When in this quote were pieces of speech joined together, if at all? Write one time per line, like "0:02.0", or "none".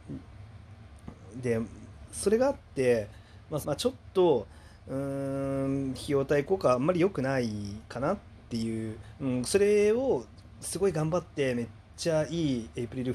0:03.6